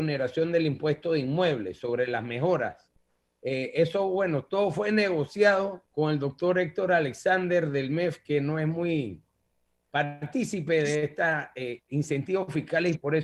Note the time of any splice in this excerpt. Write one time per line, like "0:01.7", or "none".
0:05.9